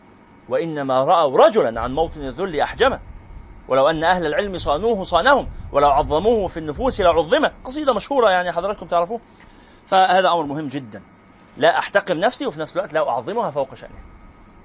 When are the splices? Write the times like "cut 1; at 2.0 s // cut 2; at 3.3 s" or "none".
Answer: none